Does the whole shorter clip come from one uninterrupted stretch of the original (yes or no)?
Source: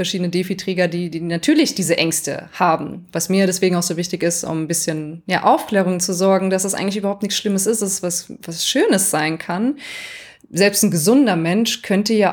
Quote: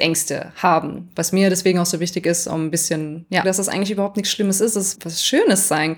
no